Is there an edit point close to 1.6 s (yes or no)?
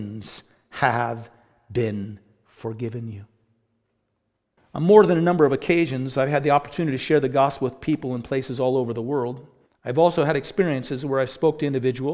no